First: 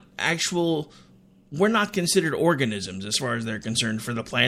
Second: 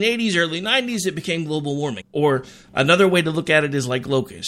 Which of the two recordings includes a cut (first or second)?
second